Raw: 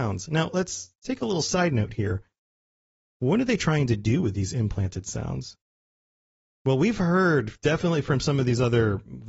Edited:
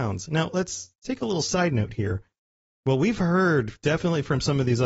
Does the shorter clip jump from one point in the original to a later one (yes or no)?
yes